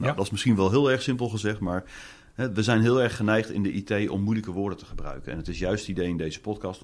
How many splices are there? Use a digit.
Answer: 0